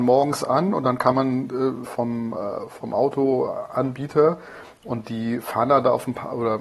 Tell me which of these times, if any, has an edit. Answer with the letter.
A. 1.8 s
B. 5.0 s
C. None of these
A